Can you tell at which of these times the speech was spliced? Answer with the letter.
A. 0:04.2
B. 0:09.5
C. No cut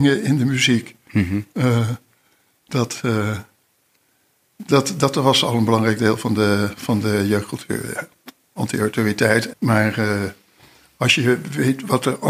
B